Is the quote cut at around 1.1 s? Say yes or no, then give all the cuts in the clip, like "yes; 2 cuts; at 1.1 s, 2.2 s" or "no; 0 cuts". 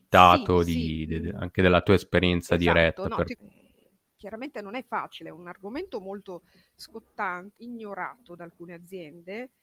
no; 2 cuts; at 3.3 s, 7.6 s